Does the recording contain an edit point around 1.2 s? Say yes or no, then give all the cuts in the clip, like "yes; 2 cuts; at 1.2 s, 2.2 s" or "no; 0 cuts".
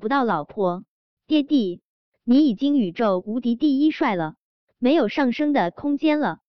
yes; 1 cut; at 1.2 s